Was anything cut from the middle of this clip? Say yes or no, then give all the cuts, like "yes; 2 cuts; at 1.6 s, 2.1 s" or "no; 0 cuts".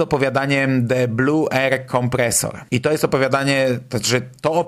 yes; 1 cut; at 2.7 s